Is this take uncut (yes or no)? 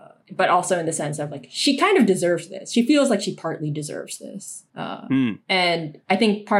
yes